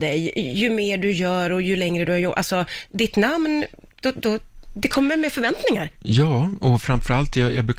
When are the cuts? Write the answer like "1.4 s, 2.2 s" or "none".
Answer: none